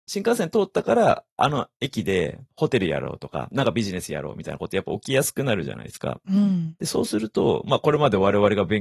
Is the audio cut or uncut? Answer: uncut